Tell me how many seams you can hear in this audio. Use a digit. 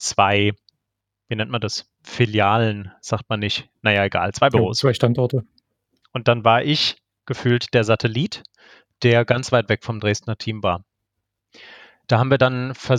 1